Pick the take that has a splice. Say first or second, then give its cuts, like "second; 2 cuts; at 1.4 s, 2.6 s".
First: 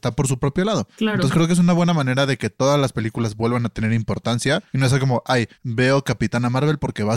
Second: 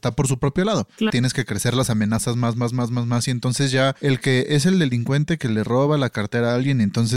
second; 1 cut; at 1.1 s